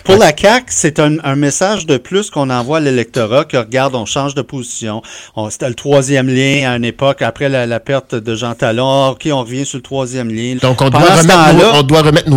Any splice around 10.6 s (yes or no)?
yes